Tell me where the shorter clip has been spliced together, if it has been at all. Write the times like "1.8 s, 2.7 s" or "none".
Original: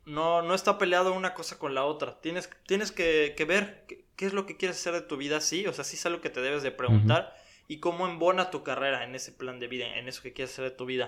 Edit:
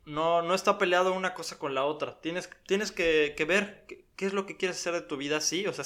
none